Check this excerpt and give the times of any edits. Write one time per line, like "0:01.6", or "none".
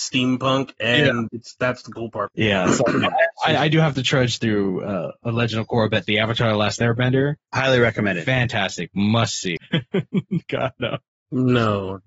0:01.3
0:09.6